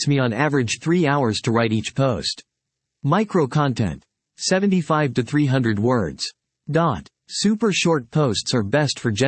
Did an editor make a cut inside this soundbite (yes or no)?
yes